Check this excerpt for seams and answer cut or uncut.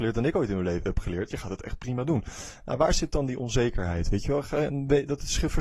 uncut